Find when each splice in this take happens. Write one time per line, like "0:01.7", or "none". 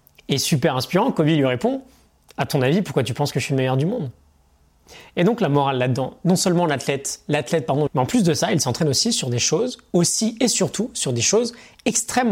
0:07.9